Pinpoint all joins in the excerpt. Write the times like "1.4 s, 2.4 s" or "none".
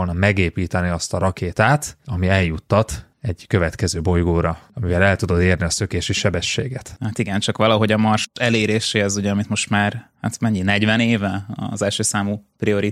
none